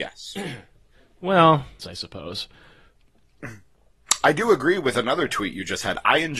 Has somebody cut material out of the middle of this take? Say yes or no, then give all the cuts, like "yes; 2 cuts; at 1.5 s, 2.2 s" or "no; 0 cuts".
yes; 1 cut; at 1.8 s